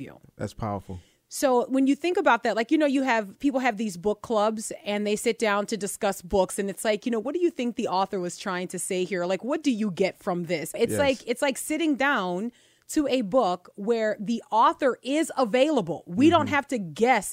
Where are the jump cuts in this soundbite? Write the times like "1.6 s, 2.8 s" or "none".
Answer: 10.7 s